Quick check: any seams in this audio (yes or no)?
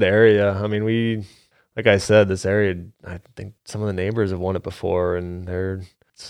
no